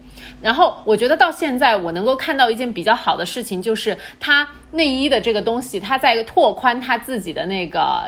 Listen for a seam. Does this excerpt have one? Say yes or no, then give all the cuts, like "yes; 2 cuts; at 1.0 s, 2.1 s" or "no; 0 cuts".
no; 0 cuts